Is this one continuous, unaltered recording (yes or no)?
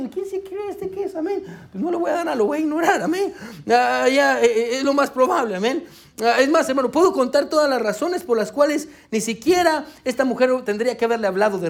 yes